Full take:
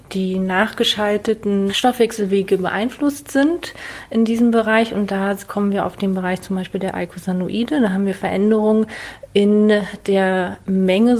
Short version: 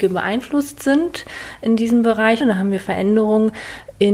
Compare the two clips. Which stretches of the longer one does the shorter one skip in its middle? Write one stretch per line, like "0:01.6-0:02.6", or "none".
0:04.9-0:07.8